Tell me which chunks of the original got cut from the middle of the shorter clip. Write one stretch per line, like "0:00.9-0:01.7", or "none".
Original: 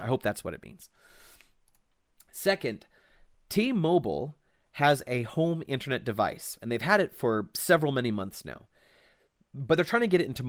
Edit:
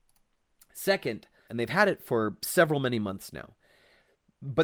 0:03.1-0:06.6